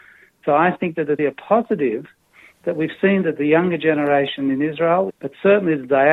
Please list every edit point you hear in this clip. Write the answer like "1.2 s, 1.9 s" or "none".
1.2 s, 5.1 s